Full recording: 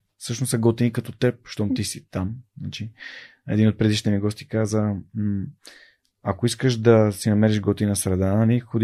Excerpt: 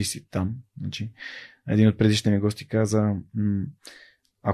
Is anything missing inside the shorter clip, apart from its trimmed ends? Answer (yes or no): no